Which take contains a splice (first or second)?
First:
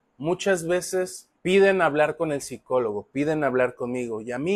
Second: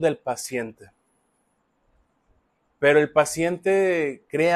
first